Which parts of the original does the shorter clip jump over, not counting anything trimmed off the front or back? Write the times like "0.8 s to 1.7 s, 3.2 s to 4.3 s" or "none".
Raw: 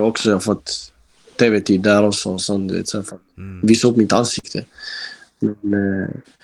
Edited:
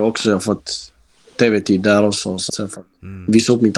2.5 s to 2.8 s